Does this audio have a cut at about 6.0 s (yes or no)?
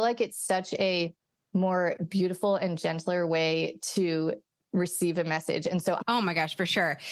yes